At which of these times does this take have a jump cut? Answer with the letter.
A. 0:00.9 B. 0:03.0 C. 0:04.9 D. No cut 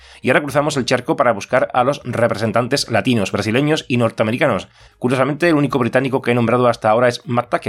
C